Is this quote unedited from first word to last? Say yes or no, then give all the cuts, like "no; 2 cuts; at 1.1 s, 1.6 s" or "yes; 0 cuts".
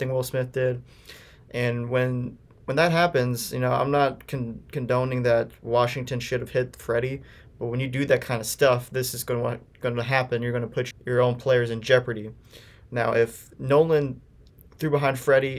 no; 1 cut; at 10.9 s